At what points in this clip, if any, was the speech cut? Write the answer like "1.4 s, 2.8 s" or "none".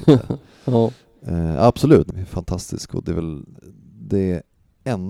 2.1 s